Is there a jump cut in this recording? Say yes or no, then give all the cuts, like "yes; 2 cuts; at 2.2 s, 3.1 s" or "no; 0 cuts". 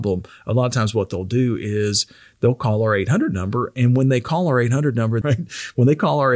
yes; 1 cut; at 5.2 s